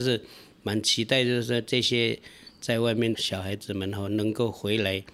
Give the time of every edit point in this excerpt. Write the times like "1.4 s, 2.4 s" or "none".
3.2 s